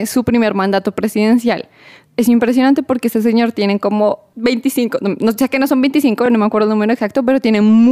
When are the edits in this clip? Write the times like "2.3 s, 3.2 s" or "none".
none